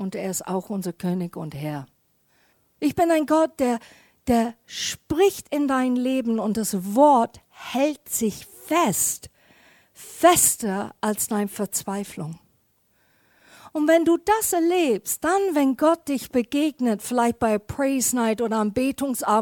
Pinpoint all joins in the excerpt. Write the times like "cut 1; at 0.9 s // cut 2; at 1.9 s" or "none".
cut 1; at 2.8 s